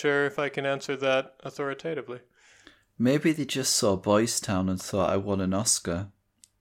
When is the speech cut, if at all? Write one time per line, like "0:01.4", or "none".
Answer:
none